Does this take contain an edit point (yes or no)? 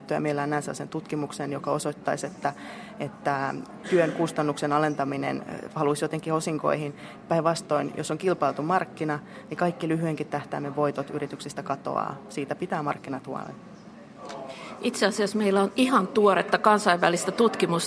no